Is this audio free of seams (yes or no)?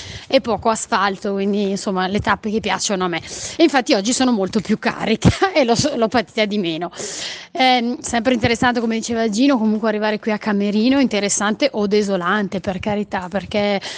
yes